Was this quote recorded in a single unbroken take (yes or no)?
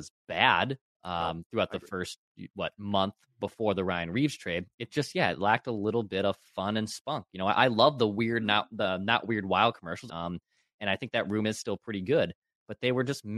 no